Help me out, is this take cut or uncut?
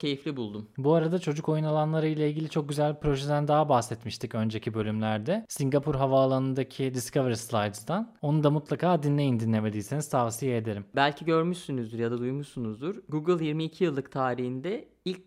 cut